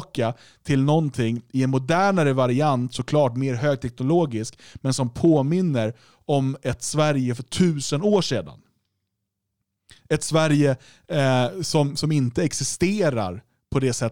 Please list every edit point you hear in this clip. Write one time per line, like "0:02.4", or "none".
none